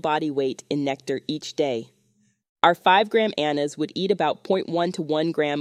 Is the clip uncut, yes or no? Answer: yes